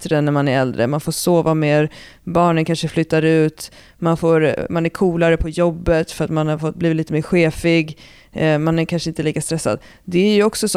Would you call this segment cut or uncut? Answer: uncut